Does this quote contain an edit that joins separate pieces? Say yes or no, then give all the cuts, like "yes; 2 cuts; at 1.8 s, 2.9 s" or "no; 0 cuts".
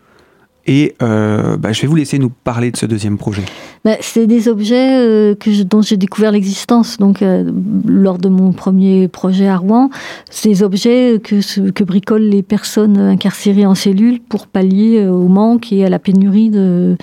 no; 0 cuts